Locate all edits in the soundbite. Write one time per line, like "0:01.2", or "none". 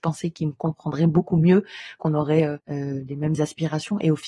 0:02.0